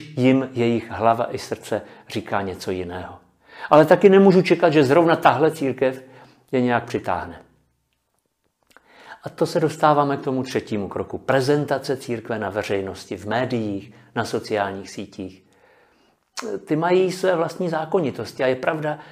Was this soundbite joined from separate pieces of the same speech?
no; 0 cuts

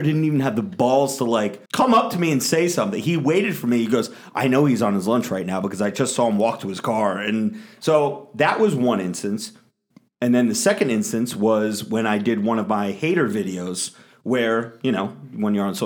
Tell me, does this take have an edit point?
yes; 1 cut; at 1.6 s

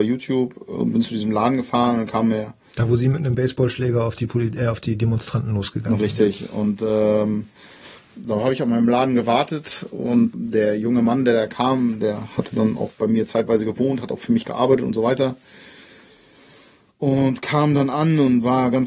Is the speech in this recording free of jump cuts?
yes; 0 cuts

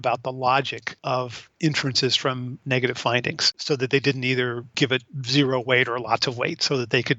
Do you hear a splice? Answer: no; 0 cuts

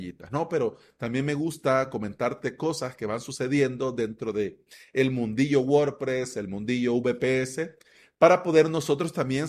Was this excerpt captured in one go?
yes; 0 cuts

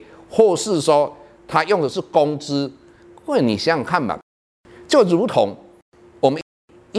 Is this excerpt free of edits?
yes; 0 cuts

